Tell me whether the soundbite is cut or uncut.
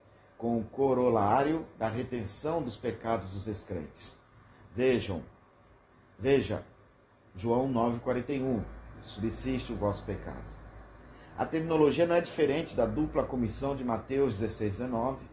uncut